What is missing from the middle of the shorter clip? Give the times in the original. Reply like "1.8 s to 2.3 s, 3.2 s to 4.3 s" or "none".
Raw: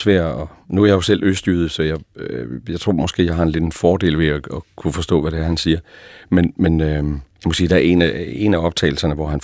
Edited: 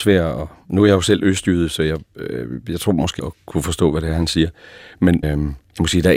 3.2 s to 4.5 s, 6.5 s to 6.9 s